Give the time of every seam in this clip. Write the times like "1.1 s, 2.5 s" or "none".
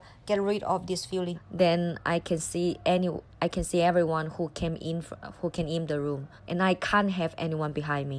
1.3 s, 6.4 s

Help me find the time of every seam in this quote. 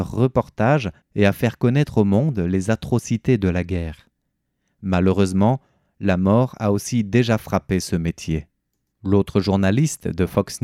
8.9 s

